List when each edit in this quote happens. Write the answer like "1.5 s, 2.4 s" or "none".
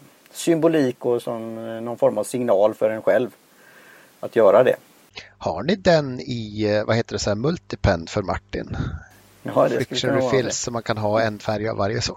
none